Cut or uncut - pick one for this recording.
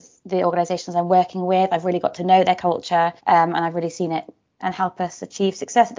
cut